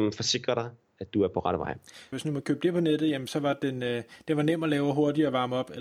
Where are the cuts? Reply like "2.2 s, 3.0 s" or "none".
2.1 s